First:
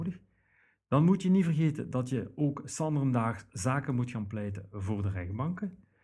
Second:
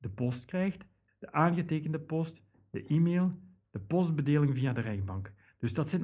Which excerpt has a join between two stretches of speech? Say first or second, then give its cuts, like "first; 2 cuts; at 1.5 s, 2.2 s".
second; 2 cuts; at 1.1 s, 3.6 s